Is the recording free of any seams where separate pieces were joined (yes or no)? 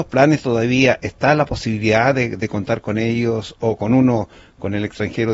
yes